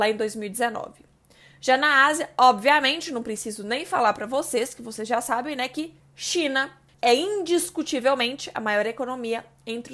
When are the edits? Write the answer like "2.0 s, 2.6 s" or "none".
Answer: none